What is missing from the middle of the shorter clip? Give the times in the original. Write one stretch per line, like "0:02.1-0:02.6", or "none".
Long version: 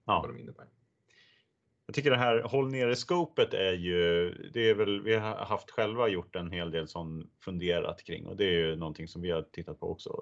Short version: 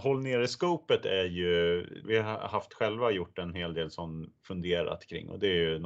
0:04.5-0:05.0